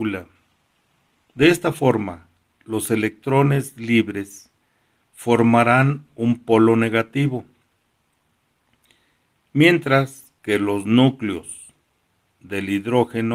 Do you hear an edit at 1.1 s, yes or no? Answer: yes